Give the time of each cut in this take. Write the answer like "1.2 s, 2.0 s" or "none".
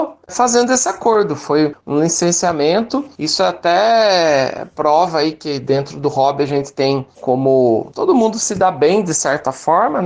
none